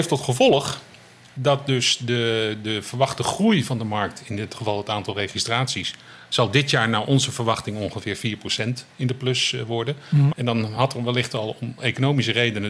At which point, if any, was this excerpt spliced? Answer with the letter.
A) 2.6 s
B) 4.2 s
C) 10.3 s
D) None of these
C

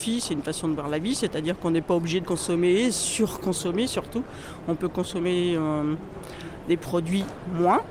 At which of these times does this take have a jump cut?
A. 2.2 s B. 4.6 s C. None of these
A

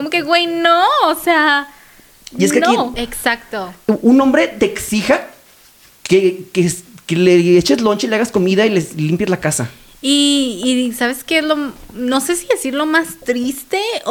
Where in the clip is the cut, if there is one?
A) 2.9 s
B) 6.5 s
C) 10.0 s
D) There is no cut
A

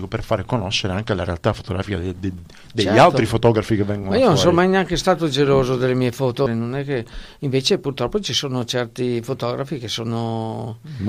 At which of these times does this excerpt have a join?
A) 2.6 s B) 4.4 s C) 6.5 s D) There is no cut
C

